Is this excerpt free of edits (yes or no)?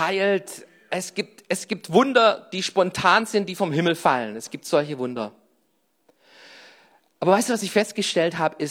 yes